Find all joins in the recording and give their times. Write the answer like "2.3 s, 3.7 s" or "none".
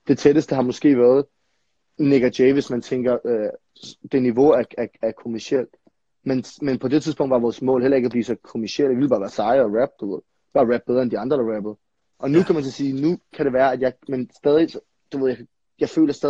12.1 s